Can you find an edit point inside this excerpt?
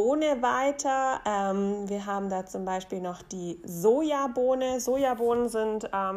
no; 0 cuts

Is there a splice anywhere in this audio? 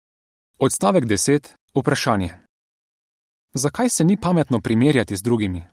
no; 0 cuts

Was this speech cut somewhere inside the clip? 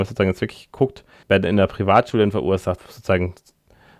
yes; 2 cuts; at 1.2 s, 2.8 s

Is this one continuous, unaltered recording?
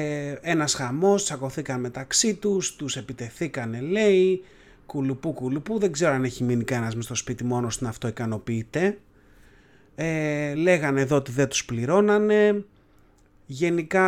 yes; 0 cuts

